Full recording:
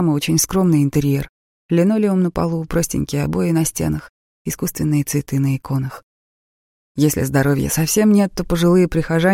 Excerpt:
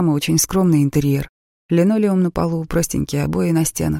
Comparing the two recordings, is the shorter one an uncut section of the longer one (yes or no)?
yes